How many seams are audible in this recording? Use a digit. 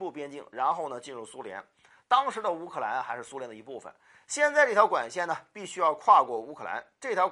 0